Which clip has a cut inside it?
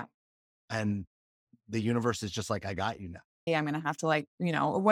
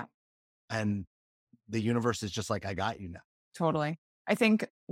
first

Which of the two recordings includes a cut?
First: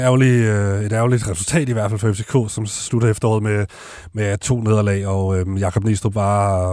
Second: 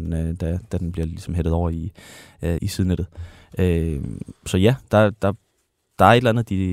second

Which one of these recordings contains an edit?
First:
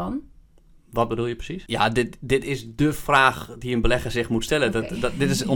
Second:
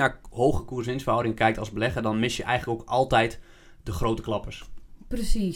first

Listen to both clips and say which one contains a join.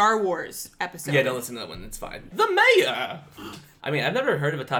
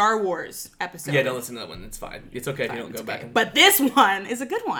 first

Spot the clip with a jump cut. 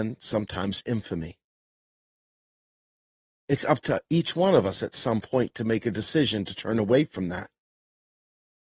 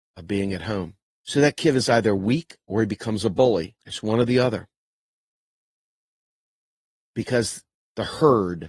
second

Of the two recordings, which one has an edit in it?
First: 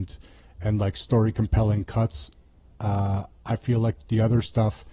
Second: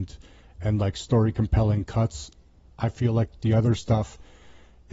second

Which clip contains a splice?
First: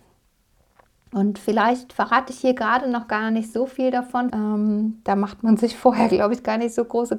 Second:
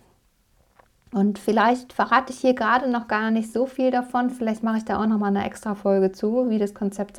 first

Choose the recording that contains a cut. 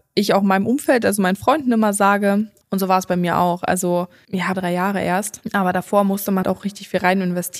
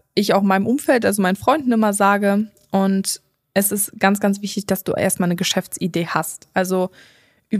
first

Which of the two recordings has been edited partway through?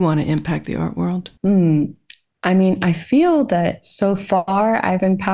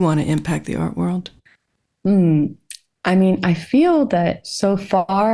first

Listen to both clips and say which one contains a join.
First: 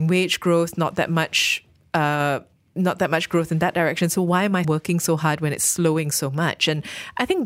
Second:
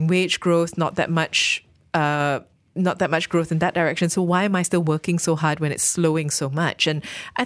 first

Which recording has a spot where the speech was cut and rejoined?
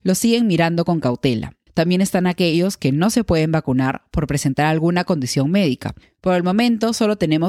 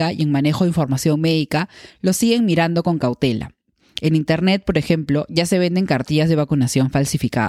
first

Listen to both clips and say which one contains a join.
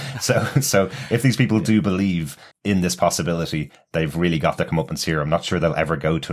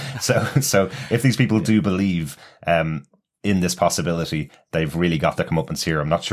first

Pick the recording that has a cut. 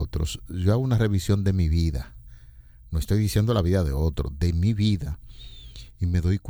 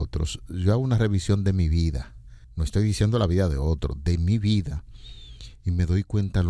second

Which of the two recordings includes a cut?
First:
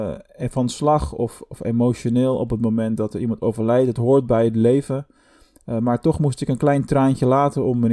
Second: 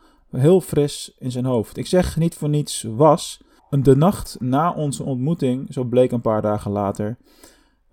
second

